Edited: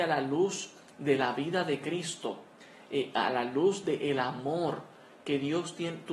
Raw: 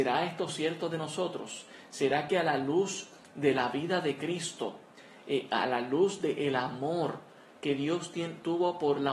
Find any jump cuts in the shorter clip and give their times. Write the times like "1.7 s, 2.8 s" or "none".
none